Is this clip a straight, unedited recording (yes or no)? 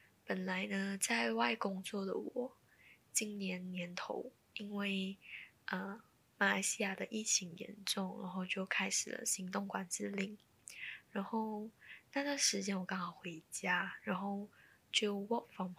yes